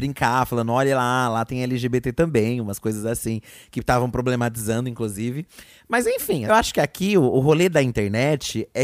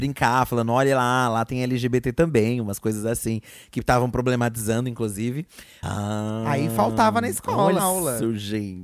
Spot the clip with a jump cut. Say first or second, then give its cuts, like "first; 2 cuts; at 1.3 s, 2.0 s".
second; 2 cuts; at 5.8 s, 7.8 s